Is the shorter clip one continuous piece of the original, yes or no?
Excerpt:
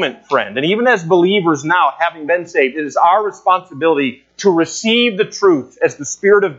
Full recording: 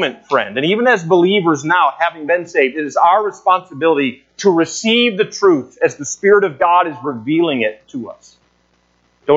yes